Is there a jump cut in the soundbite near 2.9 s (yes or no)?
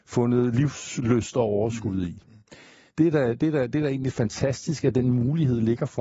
yes